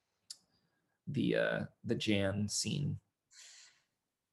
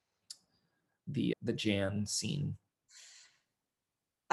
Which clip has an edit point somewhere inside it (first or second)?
second